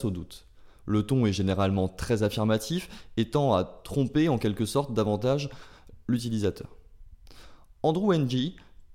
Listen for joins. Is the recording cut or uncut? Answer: uncut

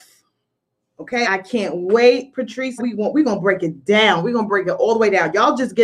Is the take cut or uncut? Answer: cut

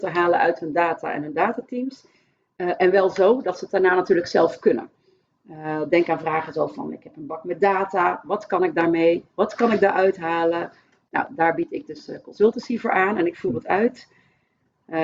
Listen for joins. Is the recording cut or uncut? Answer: uncut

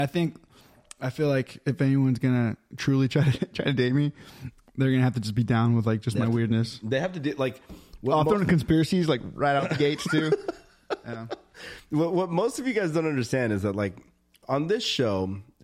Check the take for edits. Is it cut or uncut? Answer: uncut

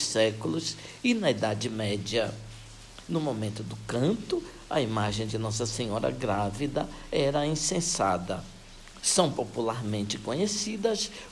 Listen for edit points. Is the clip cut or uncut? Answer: cut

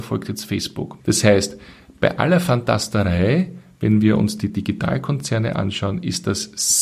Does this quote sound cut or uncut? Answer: cut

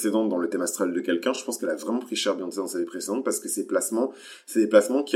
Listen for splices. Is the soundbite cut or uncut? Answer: uncut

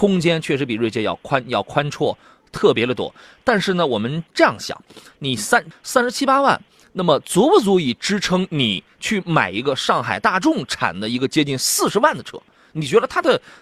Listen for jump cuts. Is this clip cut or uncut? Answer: cut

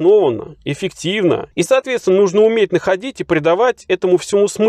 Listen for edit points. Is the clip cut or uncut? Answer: cut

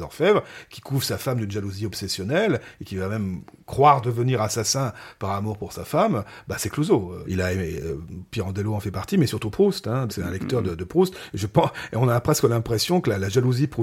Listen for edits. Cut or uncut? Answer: cut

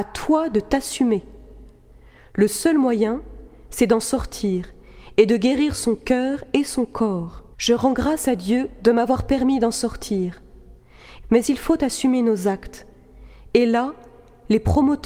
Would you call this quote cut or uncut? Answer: cut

